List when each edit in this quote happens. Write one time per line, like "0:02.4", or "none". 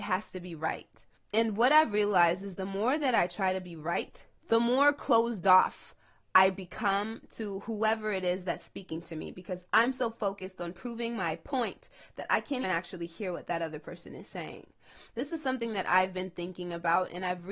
0:12.6
0:15.1